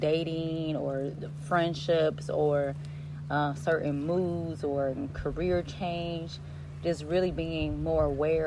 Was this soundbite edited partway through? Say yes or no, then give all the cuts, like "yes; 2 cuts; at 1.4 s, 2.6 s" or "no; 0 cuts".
no; 0 cuts